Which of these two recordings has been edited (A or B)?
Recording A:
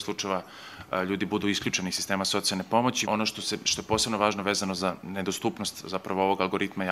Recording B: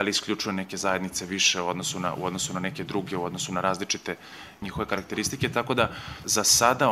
A